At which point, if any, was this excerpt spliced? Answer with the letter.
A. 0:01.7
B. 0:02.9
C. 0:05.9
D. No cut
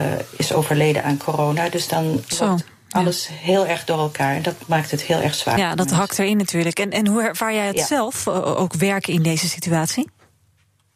D